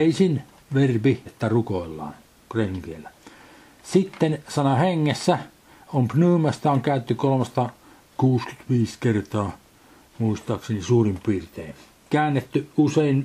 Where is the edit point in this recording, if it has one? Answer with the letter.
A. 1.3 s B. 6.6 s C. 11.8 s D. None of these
A